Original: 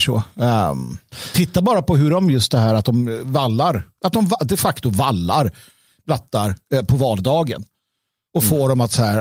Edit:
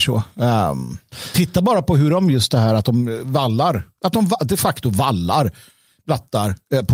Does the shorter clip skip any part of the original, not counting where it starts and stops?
no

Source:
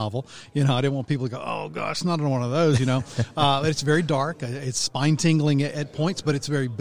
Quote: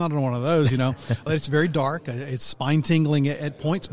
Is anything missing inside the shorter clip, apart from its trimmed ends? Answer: yes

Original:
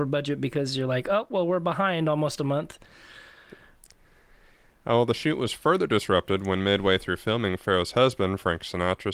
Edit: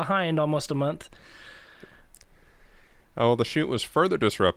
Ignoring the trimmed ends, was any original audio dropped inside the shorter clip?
no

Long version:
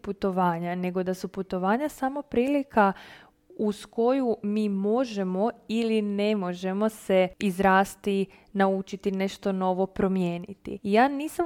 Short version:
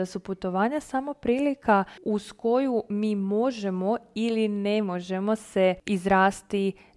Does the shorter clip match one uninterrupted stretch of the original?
no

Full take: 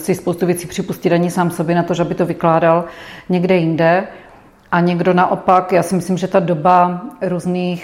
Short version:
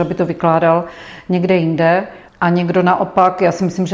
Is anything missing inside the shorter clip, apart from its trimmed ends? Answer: yes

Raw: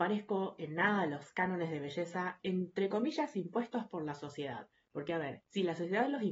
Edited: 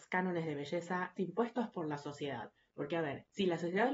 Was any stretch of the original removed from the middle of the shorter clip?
yes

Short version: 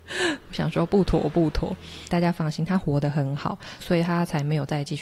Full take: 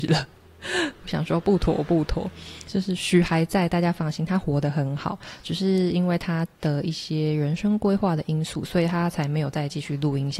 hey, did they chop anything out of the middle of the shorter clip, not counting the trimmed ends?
yes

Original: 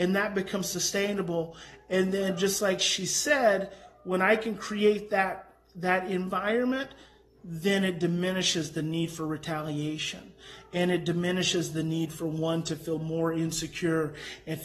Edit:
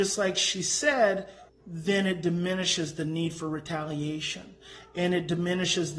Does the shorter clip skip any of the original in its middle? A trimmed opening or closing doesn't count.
yes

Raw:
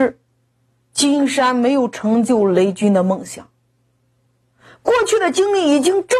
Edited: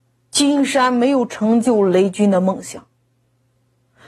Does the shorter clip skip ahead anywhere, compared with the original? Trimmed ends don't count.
no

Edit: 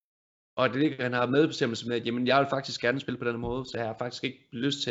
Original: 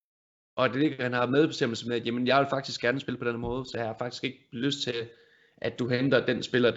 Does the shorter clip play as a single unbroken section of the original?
yes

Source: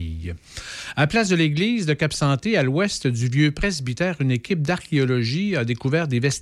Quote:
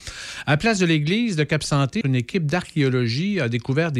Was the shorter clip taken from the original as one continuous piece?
no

